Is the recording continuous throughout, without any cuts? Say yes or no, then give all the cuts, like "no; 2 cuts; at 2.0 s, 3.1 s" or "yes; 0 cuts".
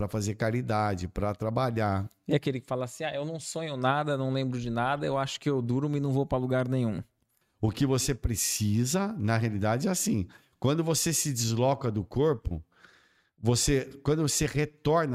no; 1 cut; at 7.4 s